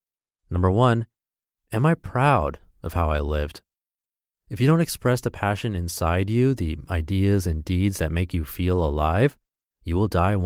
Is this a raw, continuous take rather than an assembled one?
yes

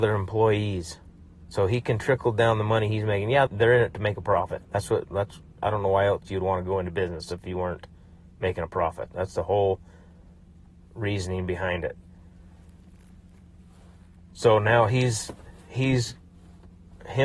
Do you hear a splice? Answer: yes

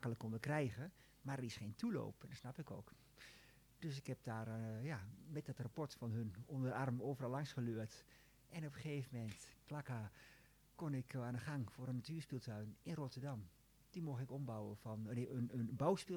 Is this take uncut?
yes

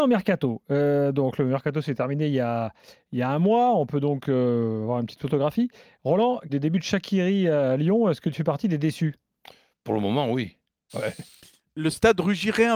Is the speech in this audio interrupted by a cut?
yes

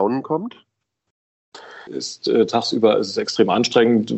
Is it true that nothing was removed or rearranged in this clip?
no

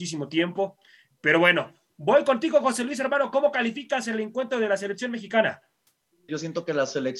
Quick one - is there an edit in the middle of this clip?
yes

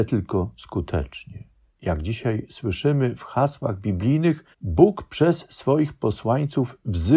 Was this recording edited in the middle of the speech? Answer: yes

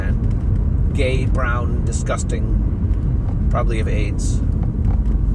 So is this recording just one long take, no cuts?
yes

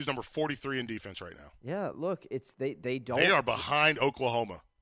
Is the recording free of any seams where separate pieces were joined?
yes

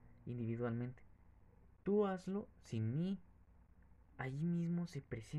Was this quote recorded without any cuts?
no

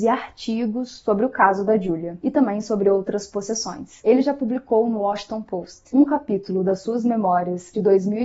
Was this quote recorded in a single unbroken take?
yes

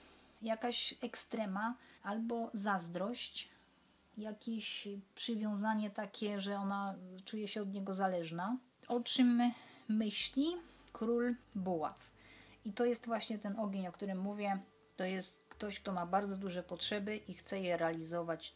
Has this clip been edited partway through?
yes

